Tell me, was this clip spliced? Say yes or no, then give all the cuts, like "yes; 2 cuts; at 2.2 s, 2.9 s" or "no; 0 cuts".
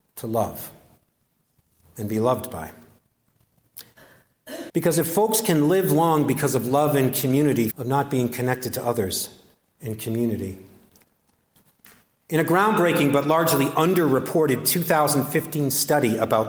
yes; 2 cuts; at 4.7 s, 7.7 s